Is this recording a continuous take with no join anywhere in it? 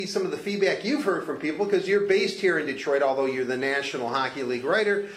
yes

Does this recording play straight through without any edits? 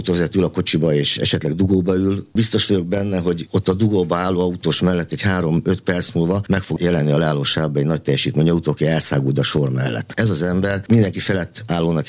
yes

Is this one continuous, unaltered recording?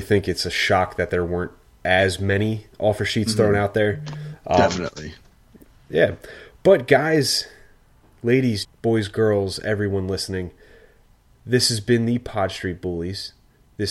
no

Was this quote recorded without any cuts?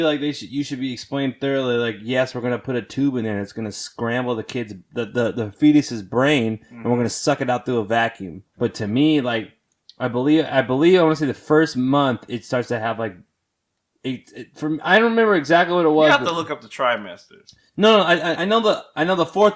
no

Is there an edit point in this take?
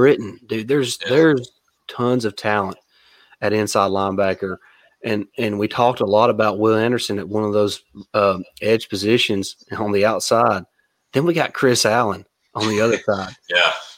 no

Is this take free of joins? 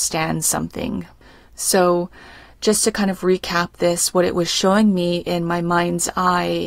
no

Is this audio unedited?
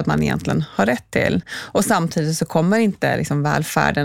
yes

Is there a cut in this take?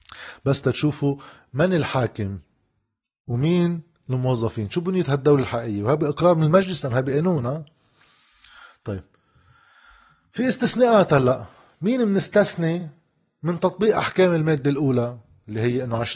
no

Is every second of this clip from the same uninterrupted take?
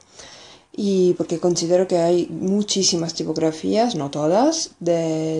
yes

